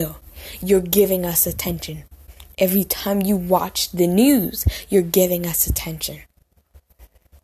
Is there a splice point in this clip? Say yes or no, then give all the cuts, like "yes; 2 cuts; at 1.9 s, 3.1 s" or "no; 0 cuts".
no; 0 cuts